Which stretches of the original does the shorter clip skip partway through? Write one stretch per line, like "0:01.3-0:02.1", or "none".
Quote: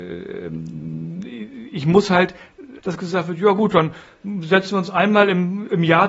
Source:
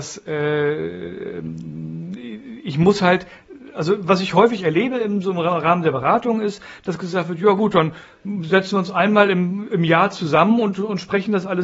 0:03.7-0:06.8